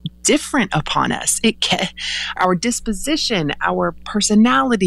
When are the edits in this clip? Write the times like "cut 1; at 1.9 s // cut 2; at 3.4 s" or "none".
cut 1; at 2.4 s

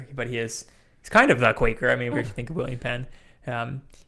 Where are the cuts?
cut 1; at 2.1 s

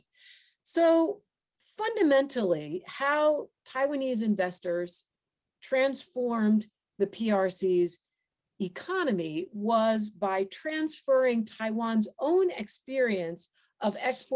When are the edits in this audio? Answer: none

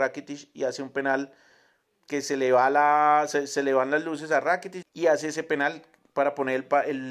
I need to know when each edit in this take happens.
cut 1; at 4.8 s

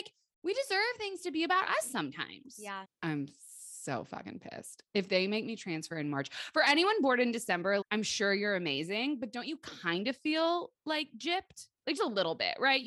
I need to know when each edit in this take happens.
cut 1; at 2.8 s // cut 2; at 7.8 s // cut 3; at 12.0 s

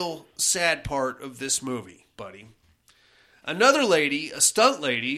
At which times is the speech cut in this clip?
cut 1; at 3.4 s

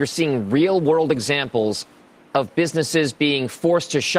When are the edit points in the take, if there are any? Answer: none

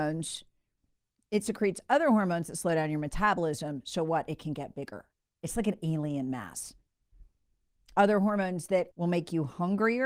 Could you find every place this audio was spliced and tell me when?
cut 1; at 1.2 s // cut 2; at 8.9 s

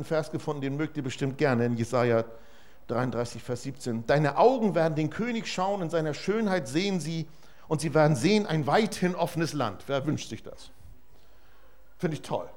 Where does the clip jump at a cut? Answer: none

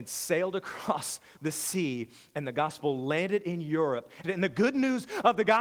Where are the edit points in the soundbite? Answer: cut 1; at 4.2 s

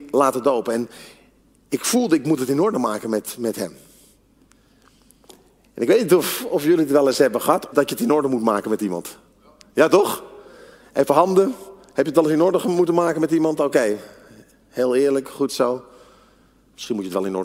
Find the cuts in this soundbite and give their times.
cut 1; at 7.7 s

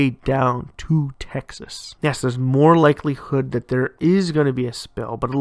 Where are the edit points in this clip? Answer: cut 1; at 2.0 s

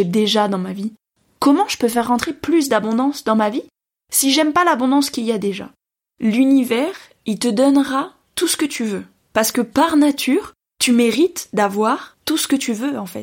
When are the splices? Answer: none

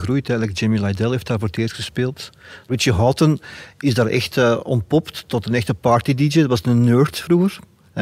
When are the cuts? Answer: none

